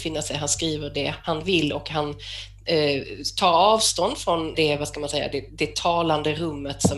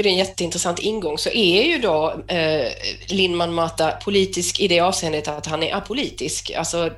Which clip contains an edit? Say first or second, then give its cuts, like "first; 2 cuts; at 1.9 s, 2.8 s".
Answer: first; 1 cut; at 4.5 s